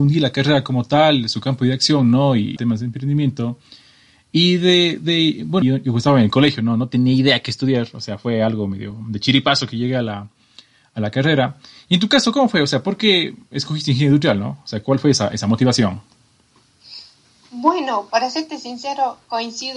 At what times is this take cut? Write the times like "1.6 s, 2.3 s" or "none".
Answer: 2.6 s, 5.6 s